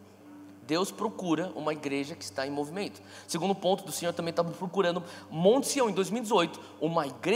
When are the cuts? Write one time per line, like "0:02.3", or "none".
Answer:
none